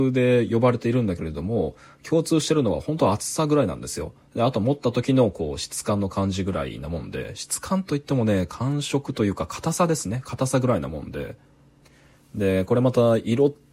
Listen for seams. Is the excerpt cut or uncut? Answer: uncut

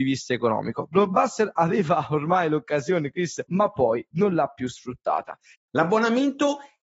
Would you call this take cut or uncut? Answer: cut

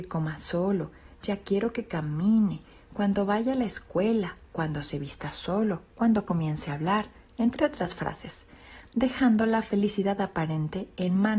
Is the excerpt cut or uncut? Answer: uncut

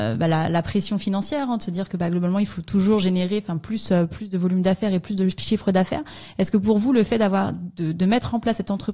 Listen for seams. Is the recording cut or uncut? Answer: uncut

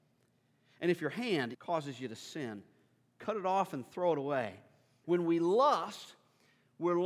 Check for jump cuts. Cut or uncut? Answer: cut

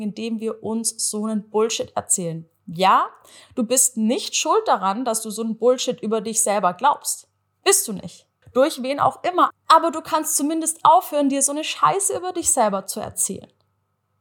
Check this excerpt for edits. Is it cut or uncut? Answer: cut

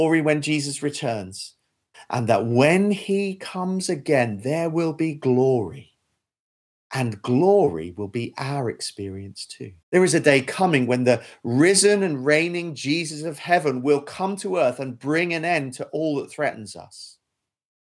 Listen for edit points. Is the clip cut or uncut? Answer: cut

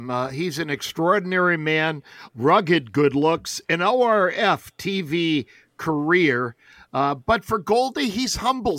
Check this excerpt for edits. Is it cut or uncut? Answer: cut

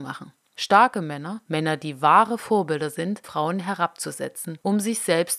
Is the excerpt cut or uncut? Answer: cut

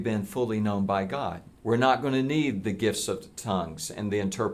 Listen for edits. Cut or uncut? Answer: cut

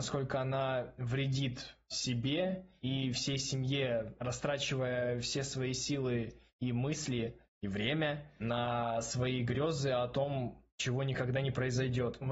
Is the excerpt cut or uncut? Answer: uncut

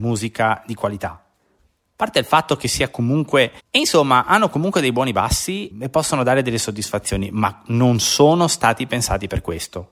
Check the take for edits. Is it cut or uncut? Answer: cut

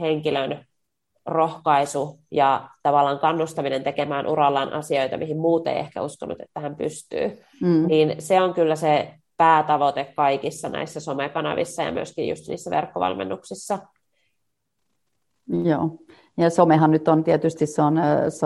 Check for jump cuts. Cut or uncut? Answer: uncut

